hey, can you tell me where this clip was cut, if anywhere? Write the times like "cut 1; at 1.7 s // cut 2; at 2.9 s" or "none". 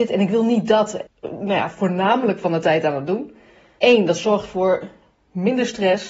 cut 1; at 1.1 s // cut 2; at 3.8 s